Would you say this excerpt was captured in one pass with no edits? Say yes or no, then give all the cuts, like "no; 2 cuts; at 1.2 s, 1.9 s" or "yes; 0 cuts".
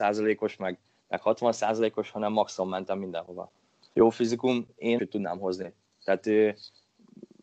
no; 2 cuts; at 3.9 s, 5.0 s